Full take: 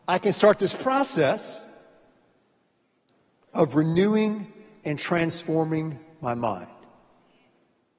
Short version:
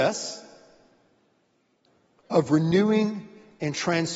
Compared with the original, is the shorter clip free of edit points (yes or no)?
yes